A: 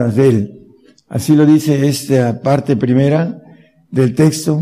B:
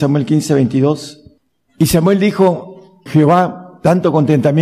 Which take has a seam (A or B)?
B